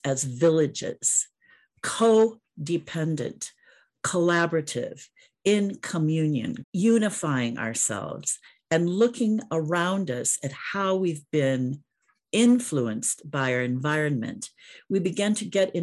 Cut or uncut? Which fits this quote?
cut